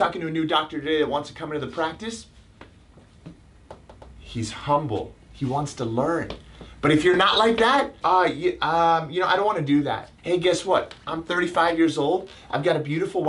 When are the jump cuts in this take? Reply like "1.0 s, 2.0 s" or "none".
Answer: 8.0 s, 10.2 s